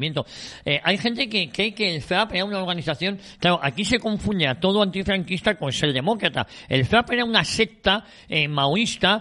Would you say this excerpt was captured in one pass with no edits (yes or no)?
yes